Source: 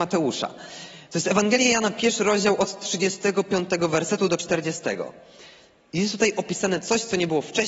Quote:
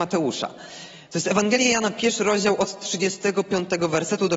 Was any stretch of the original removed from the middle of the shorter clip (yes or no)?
no